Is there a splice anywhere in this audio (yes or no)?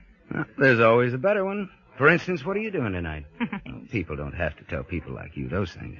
yes